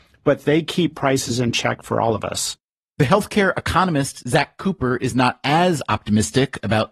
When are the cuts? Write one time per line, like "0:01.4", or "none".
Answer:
none